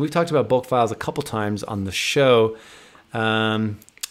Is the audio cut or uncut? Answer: uncut